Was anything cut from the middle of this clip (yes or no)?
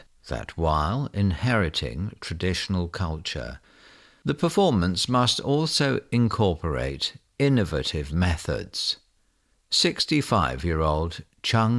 no